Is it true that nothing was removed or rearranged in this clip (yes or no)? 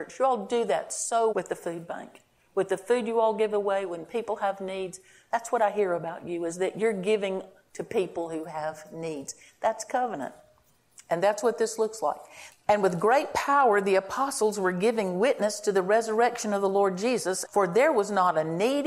no